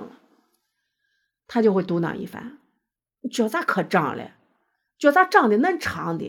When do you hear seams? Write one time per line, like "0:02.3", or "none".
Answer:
none